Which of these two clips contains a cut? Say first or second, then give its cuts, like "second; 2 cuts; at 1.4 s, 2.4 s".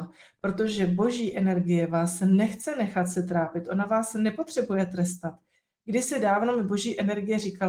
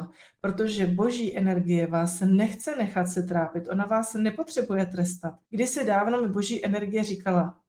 second; 1 cut; at 5.4 s